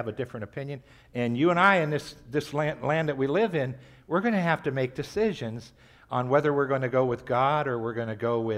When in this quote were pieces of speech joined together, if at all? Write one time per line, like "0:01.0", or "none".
0:01.0